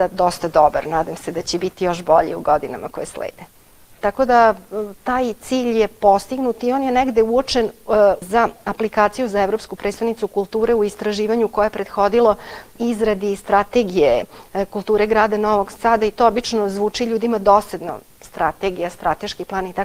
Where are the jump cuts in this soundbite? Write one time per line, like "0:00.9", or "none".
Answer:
0:04.0
0:08.2
0:12.8